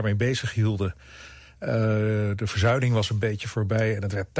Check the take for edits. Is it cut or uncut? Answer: uncut